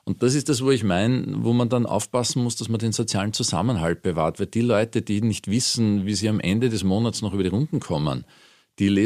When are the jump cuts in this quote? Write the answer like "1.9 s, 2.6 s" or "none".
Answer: none